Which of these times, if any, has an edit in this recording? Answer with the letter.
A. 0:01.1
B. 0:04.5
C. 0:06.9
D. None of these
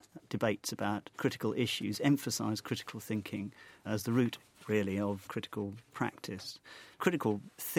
A